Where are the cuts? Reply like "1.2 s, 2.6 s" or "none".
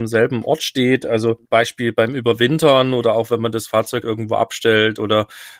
1.4 s, 4.0 s

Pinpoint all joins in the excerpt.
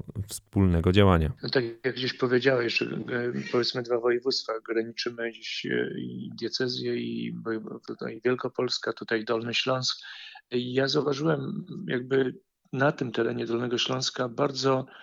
none

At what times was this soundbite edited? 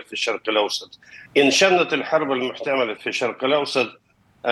1.2 s, 3.0 s

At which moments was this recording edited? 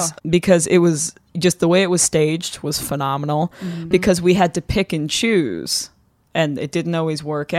3.9 s

